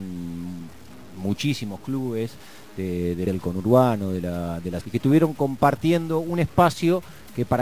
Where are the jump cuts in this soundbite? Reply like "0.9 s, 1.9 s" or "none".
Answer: 3.3 s, 4.8 s

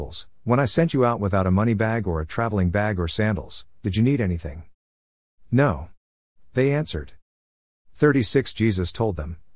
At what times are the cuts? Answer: none

